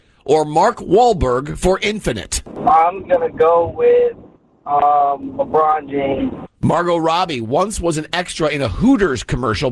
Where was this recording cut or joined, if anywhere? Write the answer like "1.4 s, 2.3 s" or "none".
3.0 s